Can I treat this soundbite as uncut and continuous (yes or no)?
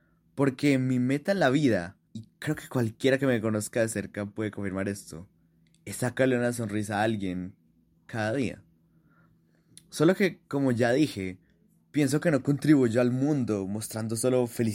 no